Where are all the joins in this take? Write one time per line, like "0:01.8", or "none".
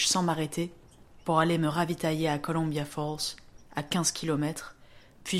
none

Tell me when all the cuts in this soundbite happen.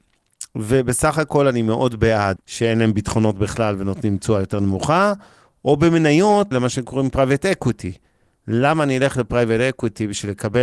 0:02.4
0:06.5

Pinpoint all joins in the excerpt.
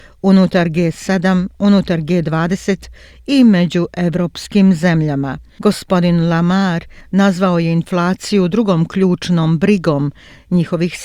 0:05.5

